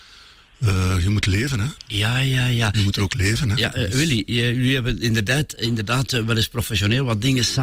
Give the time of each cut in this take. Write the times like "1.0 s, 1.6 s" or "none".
none